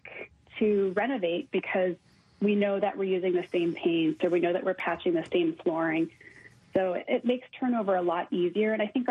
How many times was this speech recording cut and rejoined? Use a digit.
0